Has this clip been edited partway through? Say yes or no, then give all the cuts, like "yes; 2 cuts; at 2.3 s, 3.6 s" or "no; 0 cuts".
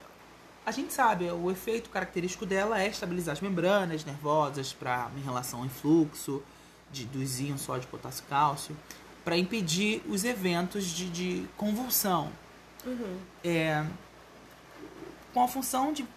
no; 0 cuts